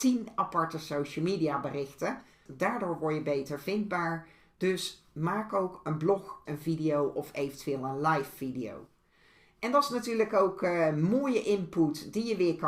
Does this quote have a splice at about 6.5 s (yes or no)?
yes